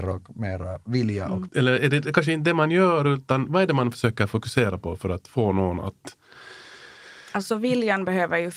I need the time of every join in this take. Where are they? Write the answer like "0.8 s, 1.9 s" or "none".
1.5 s